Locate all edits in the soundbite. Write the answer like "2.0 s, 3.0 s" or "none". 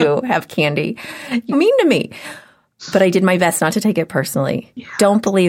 1.5 s

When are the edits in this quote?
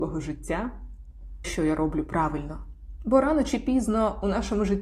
1.4 s

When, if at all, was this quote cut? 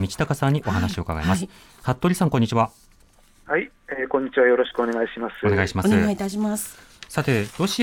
none

